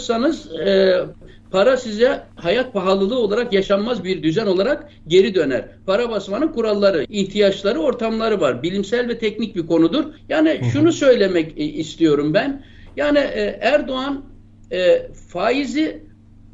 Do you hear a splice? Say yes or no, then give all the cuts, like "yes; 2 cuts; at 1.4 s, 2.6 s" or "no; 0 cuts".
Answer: yes; 2 cuts; at 7.0 s, 10.2 s